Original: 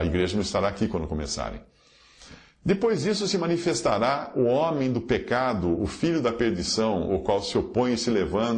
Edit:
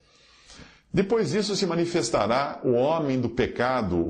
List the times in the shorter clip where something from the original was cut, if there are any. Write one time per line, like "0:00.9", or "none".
none